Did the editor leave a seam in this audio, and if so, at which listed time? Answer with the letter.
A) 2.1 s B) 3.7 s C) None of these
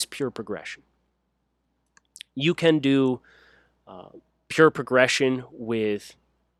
C